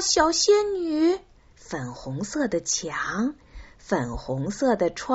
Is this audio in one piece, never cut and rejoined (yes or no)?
no